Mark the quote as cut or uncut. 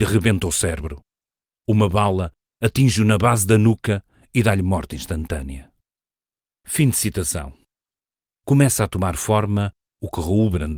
uncut